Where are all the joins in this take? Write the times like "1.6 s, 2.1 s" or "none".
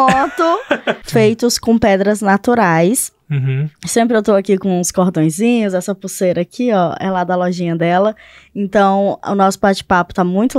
1.0 s